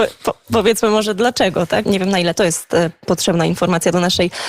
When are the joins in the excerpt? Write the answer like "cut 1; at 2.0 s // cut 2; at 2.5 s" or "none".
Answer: cut 1; at 1.8 s